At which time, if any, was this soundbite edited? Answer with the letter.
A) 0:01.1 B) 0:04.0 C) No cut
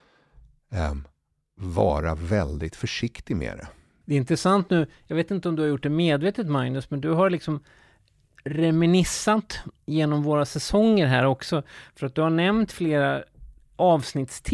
B